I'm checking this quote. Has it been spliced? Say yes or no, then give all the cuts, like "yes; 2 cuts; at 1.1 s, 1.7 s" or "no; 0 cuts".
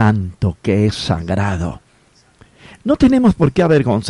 yes; 1 cut; at 2.8 s